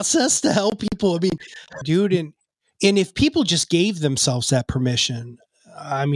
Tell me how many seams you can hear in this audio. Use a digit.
1